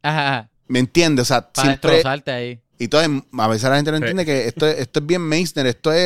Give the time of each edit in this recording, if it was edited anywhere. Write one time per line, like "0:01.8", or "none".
none